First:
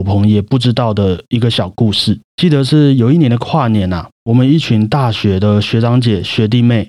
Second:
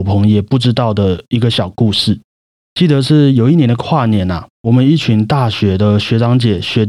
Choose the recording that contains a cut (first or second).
first